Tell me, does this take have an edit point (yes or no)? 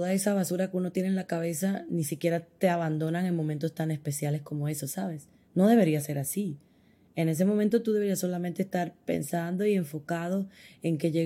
no